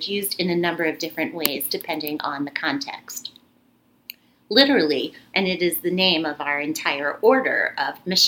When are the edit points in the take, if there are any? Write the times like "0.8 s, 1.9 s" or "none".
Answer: 5.3 s